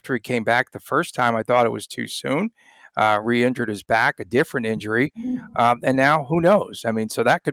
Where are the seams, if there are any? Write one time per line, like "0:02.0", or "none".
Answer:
none